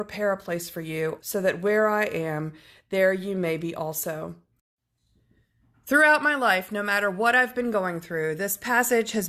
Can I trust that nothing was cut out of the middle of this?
no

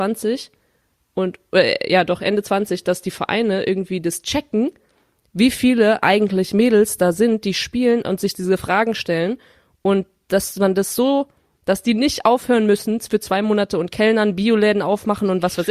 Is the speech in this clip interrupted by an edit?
no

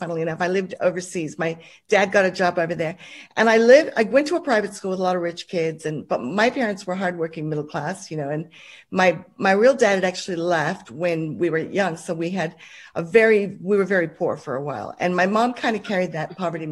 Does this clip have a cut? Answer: no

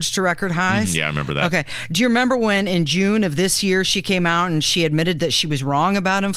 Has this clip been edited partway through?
no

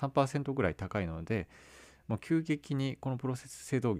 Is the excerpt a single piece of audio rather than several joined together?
yes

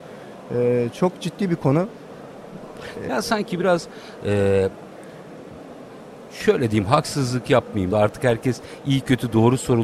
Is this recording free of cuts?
no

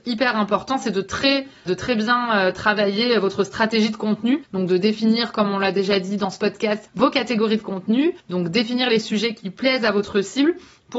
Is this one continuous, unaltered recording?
no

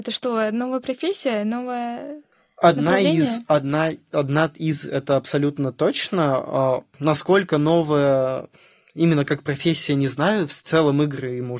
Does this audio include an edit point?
no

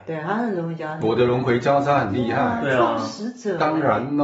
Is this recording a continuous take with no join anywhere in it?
yes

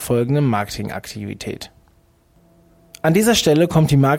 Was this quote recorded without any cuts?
yes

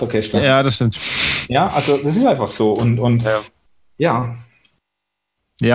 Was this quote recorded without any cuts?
yes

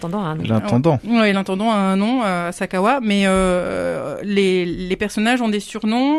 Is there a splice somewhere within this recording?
no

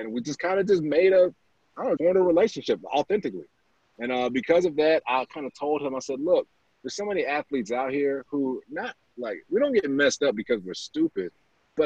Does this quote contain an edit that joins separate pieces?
yes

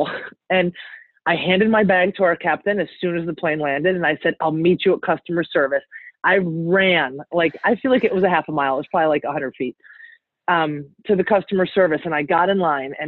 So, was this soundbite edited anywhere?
no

